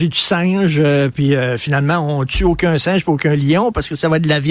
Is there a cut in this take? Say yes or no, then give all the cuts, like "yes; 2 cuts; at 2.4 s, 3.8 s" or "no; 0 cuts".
no; 0 cuts